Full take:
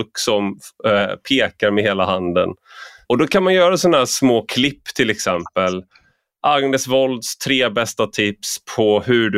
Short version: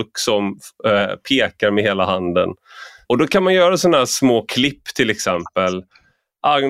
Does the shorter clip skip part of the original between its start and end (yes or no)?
no